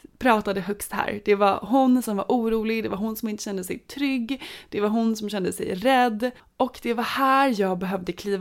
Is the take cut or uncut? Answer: uncut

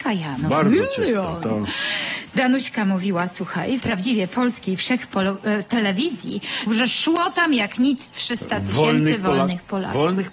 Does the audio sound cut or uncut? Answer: cut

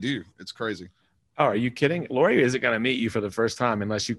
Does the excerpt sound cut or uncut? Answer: uncut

